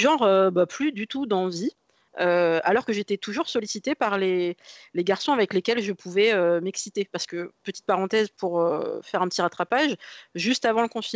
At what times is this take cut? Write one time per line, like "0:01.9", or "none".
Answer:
0:07.5